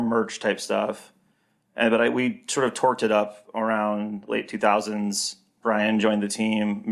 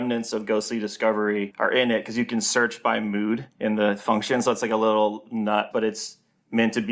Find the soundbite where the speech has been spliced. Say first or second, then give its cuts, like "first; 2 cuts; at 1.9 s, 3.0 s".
second; 1 cut; at 5.7 s